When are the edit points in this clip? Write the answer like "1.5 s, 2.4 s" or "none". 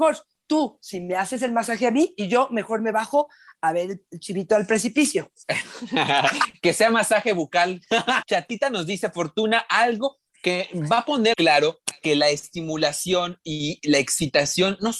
8.2 s, 11.3 s